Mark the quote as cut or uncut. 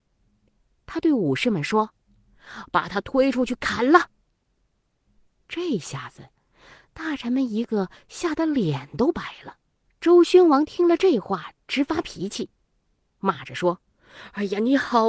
cut